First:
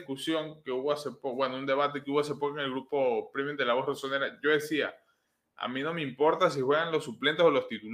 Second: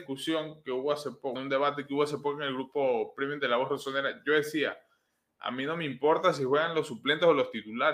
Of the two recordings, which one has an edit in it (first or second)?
second